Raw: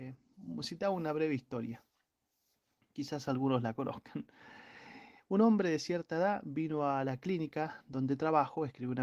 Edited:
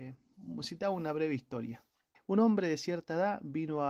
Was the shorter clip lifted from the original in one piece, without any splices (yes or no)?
no